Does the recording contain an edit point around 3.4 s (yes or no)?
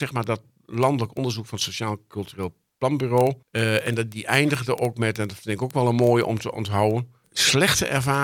yes